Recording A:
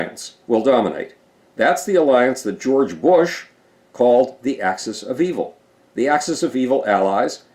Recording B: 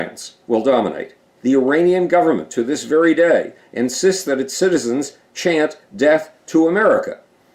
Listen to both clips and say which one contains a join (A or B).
B